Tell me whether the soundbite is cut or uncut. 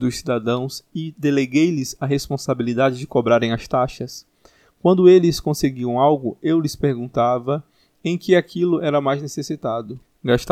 uncut